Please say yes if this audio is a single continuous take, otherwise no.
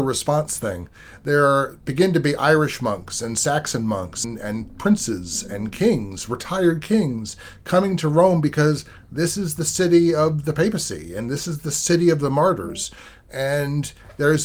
yes